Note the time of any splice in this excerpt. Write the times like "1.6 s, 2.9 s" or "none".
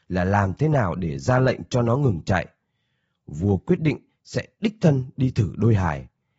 none